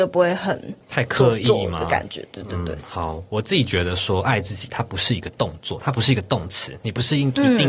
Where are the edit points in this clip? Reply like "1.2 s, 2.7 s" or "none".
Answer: none